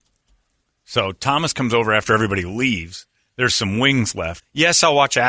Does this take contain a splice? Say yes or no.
yes